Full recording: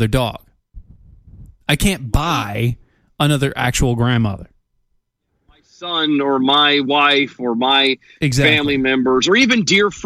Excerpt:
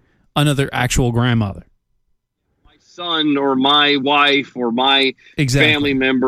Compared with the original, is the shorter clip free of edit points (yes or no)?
yes